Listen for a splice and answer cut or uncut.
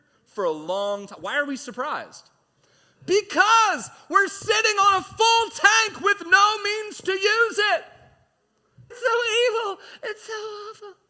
cut